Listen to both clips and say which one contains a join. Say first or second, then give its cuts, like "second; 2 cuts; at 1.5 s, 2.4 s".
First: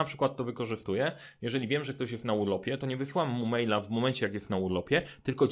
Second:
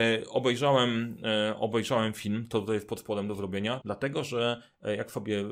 second; 1 cut; at 3.8 s